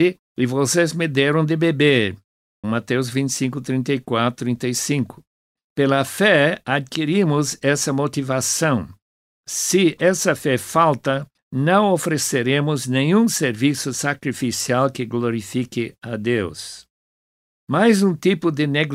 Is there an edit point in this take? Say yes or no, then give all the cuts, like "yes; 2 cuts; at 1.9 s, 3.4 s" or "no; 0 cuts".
yes; 2 cuts; at 2.6 s, 5.6 s